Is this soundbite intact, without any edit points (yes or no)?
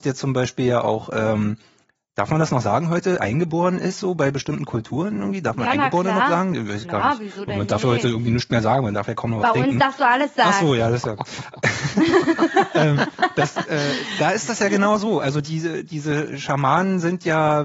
no